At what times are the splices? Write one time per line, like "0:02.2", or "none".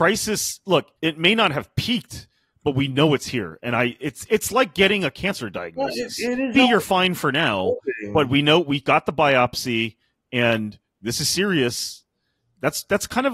0:01.0
0:06.5